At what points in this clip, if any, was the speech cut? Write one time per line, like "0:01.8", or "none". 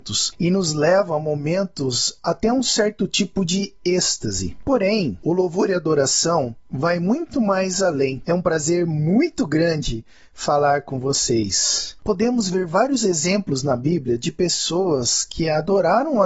0:08.3
0:12.0